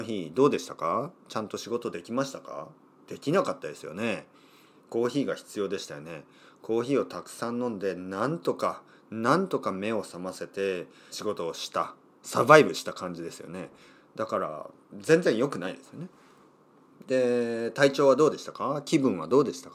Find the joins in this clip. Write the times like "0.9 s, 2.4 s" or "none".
11.1 s